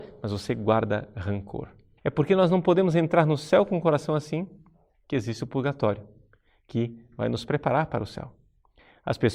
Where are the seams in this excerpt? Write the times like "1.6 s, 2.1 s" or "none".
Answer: 2.0 s